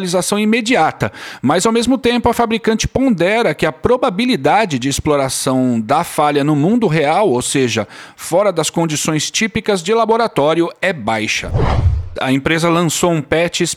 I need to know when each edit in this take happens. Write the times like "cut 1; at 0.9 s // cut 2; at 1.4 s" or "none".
cut 1; at 12.2 s